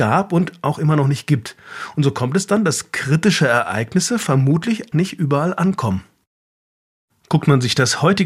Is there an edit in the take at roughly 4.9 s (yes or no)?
yes